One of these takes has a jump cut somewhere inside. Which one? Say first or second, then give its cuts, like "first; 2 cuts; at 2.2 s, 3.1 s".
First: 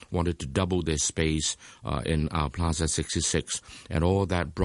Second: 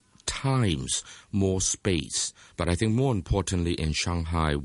second; 1 cut; at 2.5 s